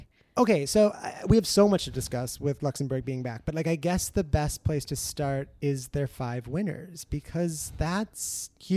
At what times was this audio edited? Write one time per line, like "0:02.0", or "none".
none